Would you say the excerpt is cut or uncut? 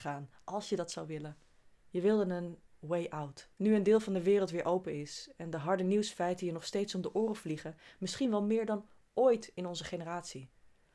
cut